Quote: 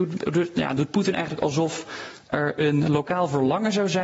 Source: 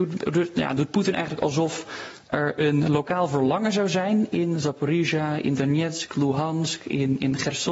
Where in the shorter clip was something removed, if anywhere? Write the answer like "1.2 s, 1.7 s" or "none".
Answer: none